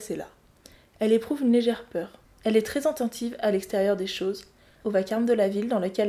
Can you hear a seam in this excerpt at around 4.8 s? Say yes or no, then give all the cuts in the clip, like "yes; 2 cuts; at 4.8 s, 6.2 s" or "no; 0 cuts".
yes; 2 cuts; at 2.2 s, 4.8 s